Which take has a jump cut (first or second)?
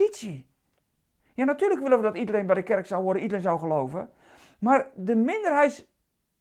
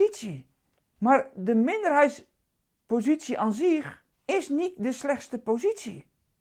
second